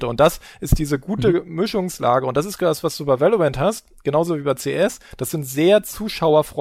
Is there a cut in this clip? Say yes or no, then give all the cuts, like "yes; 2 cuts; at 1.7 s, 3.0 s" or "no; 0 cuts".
no; 0 cuts